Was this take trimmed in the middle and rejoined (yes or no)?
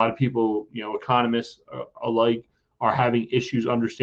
no